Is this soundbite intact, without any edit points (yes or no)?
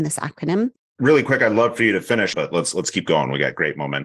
no